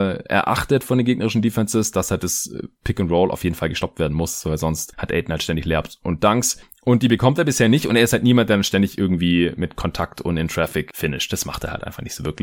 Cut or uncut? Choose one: uncut